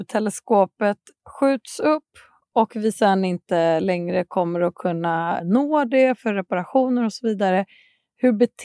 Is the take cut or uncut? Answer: cut